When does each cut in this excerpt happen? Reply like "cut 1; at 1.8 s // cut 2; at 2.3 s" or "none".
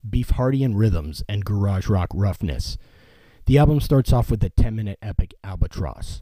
none